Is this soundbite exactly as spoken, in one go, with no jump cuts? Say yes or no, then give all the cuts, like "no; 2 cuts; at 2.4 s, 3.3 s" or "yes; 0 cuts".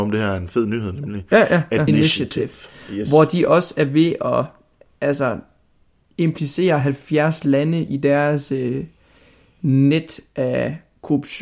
no; 1 cut; at 1.9 s